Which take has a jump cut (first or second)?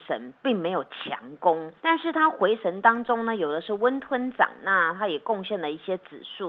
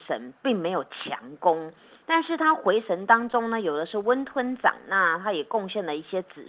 first